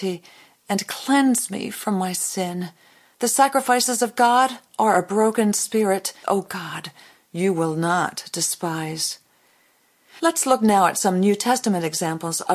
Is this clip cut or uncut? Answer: cut